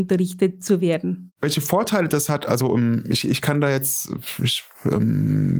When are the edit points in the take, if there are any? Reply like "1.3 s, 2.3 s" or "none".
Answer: 1.3 s